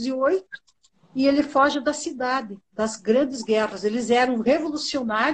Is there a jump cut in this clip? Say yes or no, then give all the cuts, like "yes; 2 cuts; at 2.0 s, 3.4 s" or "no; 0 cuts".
no; 0 cuts